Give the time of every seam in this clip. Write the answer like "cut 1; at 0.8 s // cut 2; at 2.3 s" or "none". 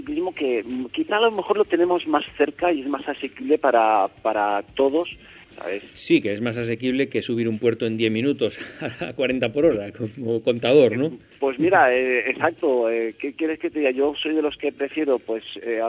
cut 1; at 5.4 s